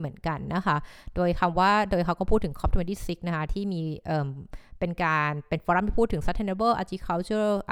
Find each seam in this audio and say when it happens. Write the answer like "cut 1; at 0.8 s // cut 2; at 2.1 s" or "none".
none